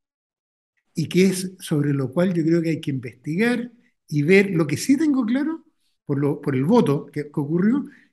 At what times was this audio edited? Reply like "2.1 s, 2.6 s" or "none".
none